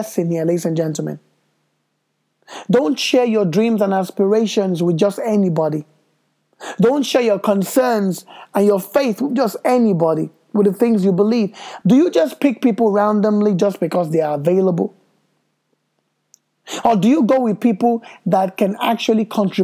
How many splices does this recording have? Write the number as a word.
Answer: one